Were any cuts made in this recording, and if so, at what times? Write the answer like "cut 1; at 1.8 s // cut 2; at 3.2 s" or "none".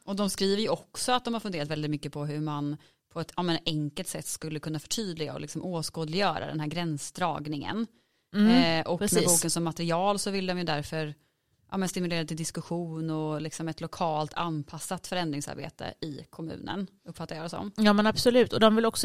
none